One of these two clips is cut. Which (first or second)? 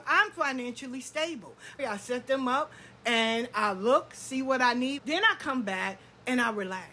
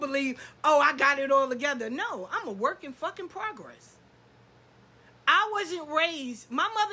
first